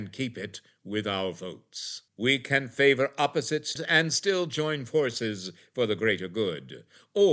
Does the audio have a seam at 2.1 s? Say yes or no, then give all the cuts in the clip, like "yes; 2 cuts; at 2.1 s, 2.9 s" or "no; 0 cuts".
yes; 2 cuts; at 2.1 s, 3.8 s